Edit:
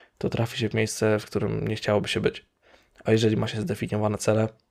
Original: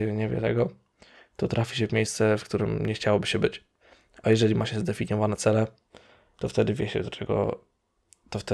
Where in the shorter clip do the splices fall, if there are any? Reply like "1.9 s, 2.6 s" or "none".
none